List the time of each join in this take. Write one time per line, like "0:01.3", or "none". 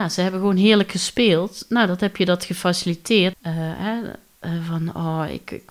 0:03.3